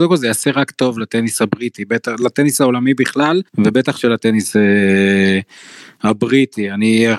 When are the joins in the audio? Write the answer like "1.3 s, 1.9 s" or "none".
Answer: 3.5 s